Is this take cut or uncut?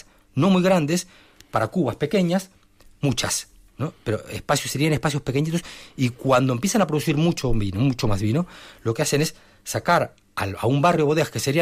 uncut